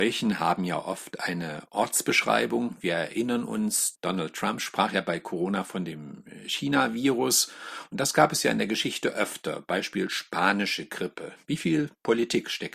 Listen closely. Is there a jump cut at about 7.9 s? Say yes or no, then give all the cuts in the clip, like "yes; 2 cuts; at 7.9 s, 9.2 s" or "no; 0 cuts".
no; 0 cuts